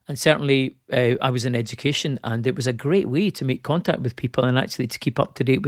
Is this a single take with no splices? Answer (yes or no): yes